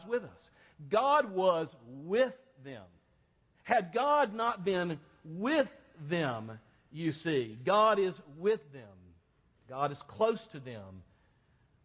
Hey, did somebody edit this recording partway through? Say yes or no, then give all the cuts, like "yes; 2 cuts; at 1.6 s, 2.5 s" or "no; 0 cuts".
no; 0 cuts